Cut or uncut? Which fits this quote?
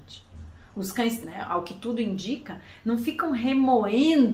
cut